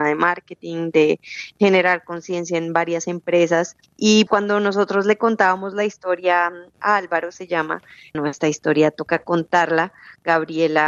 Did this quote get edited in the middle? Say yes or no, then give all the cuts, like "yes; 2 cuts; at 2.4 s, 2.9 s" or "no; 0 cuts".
yes; 2 cuts; at 4.3 s, 8.1 s